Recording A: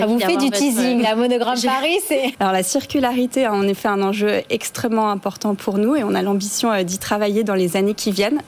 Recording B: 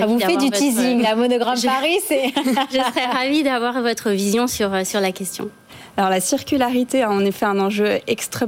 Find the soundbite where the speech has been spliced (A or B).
A